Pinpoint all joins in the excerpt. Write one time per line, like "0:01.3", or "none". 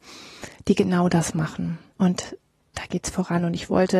0:01.9